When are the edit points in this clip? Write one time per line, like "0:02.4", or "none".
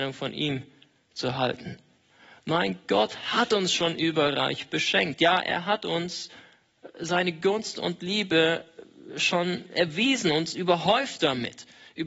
none

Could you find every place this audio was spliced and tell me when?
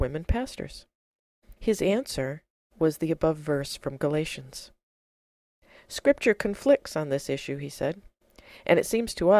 0:01.6

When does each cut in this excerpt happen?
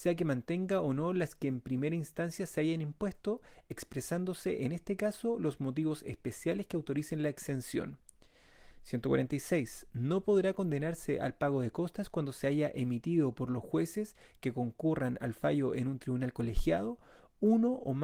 none

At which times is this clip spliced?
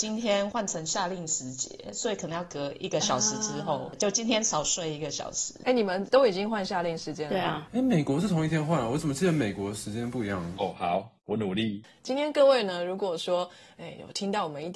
0:10.5

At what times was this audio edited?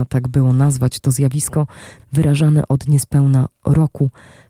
0:02.0

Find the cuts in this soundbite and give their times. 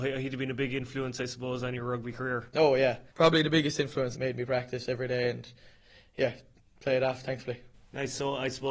0:03.1
0:04.1

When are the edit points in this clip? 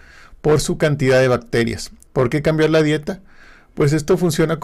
0:02.1

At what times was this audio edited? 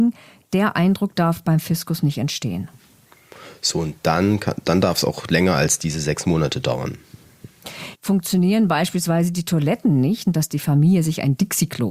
0:07.9
0:10.3

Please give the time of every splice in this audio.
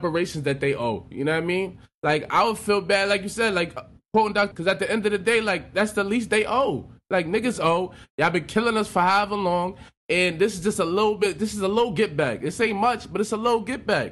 0:04.5

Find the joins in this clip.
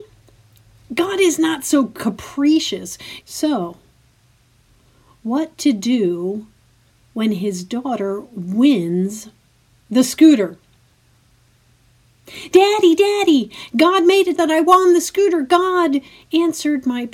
0:03.2
0:14.4

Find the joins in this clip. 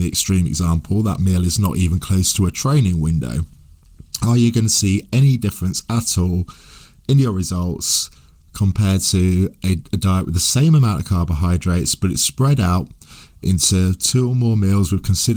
none

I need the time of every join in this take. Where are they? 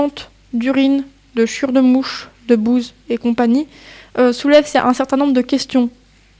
none

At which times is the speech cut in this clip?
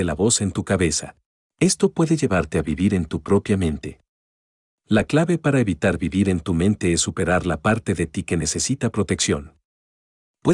0:01.5

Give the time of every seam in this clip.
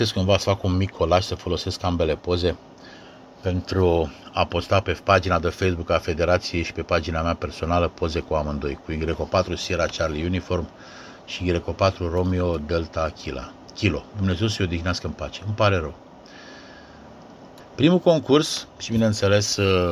0:04.8
0:17.6

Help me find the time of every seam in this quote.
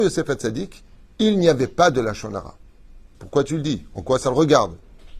0:03.1

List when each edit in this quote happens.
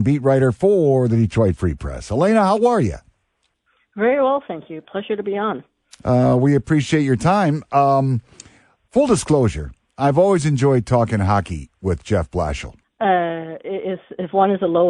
0:12.8

